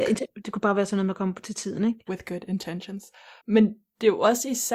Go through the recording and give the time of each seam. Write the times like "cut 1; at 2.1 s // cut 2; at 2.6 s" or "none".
cut 1; at 2.1 s // cut 2; at 3.4 s